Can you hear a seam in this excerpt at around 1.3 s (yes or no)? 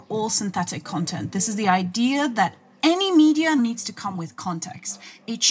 no